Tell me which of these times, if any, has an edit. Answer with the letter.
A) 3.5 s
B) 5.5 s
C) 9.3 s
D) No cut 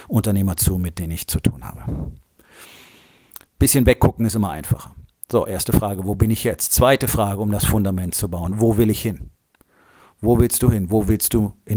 A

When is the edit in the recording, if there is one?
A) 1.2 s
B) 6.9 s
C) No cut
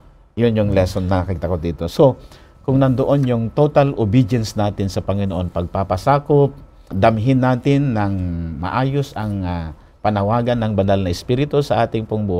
B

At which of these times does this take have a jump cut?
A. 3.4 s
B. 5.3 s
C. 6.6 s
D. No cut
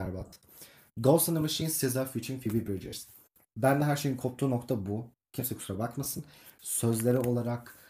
C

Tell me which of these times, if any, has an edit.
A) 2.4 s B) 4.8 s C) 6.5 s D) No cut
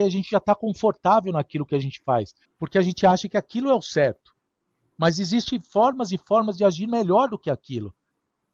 A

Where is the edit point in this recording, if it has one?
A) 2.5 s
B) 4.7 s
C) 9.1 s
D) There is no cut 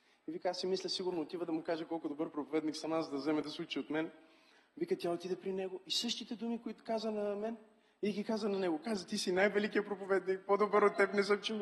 D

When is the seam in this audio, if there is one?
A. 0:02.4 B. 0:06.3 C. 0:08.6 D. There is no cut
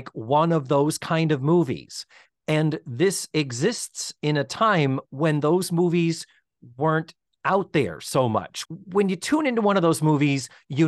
C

